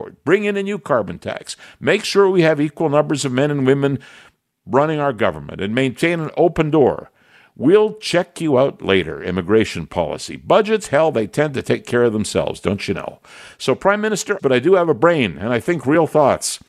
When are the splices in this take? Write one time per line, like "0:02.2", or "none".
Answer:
0:14.4